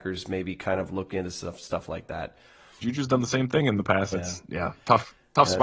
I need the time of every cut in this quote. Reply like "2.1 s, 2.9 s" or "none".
2.8 s, 4.1 s

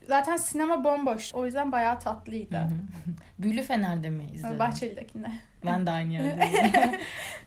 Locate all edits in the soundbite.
1.3 s

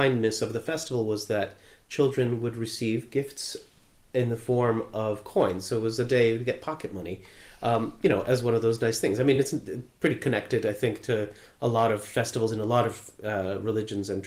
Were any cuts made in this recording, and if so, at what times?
none

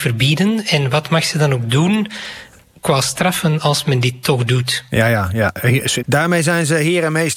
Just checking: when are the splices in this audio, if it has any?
6.0 s

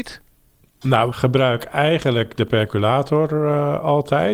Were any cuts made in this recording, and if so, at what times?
1.1 s

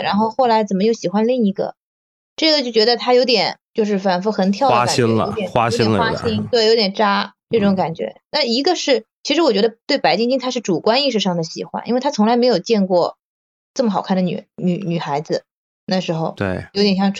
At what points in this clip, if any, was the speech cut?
none

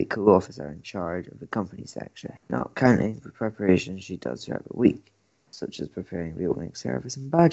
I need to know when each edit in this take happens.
none

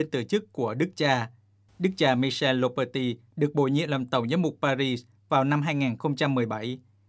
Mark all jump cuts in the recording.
1.7 s

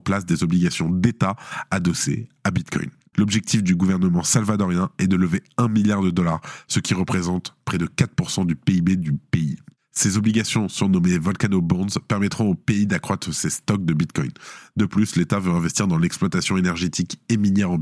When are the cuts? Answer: 3.1 s

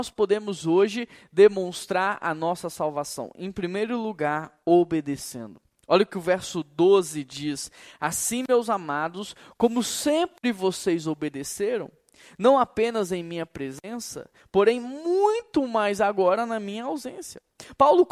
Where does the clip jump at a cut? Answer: none

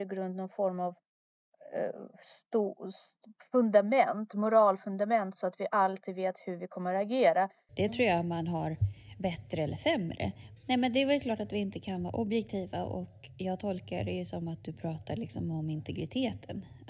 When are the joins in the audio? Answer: 7.7 s, 10.6 s

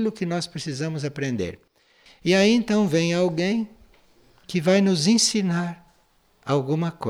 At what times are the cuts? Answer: 2.1 s

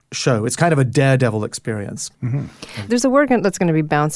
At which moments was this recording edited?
none

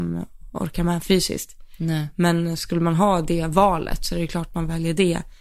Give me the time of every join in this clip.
none

